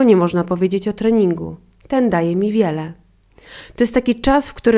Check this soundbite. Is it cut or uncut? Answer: uncut